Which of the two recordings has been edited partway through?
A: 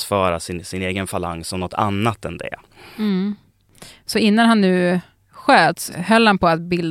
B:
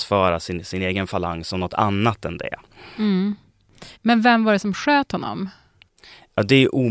B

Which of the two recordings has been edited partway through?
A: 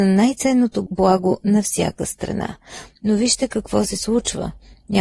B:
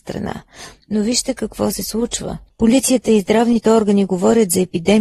B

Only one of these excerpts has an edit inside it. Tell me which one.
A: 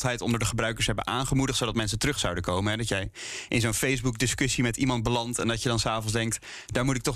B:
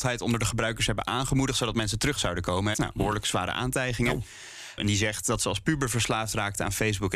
B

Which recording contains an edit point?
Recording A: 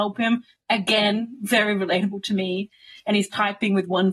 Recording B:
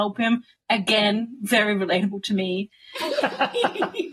B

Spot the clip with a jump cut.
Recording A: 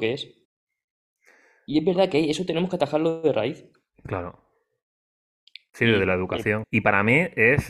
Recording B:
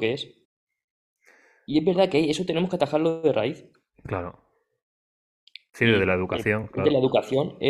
A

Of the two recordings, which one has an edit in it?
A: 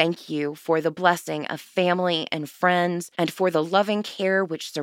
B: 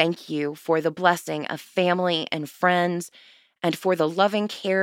A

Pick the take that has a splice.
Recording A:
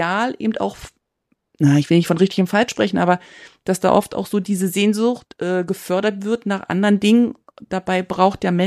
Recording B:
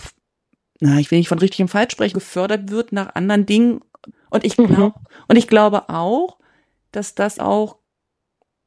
B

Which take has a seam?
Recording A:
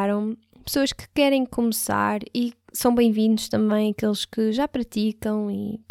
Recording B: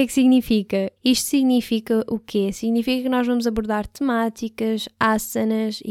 B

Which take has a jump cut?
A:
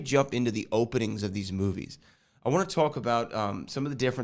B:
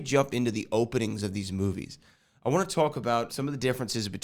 B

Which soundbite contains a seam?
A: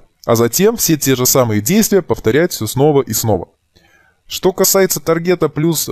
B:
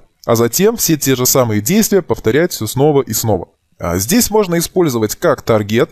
B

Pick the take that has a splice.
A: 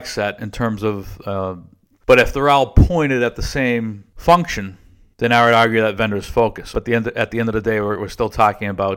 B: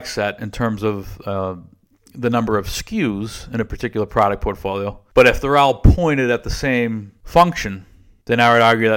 A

